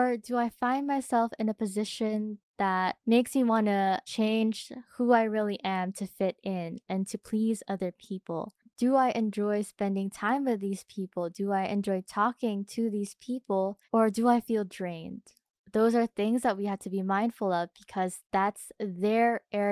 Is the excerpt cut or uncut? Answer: cut